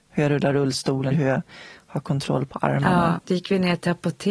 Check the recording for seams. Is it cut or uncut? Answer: cut